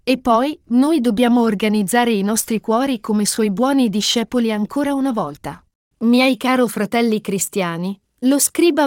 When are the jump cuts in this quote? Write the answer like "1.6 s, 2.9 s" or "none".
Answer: none